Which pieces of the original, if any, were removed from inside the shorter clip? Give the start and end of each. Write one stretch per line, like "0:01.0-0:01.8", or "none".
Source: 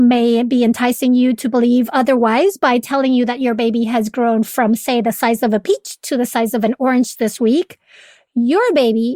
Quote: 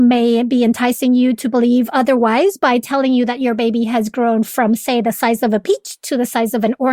none